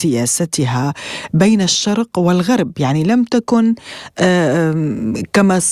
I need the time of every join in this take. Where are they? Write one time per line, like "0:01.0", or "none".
none